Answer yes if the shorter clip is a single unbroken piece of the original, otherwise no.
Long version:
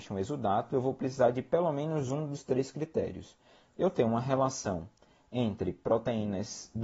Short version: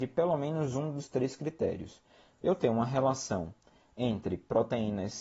yes